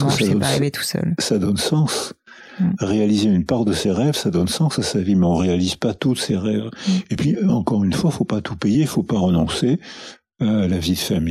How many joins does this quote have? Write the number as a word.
zero